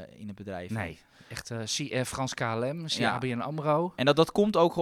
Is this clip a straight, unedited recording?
yes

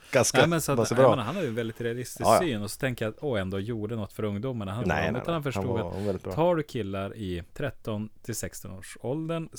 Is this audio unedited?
no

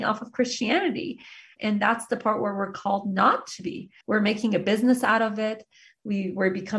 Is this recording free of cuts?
no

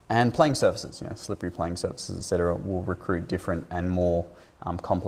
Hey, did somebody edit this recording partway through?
no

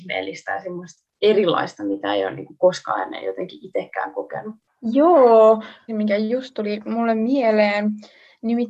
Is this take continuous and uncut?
no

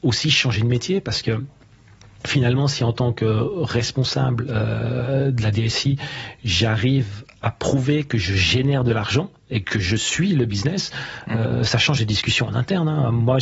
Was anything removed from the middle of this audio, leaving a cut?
no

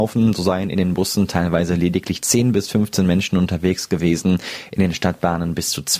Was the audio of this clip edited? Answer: no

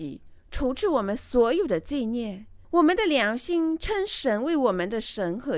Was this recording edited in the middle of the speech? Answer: yes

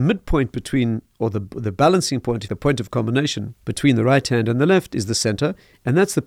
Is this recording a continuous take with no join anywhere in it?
no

